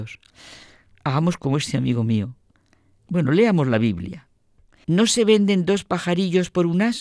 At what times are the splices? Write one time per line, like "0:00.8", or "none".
0:03.0
0:04.8